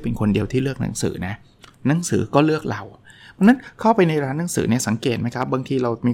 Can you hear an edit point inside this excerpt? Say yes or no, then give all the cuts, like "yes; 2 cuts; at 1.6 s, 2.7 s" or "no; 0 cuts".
no; 0 cuts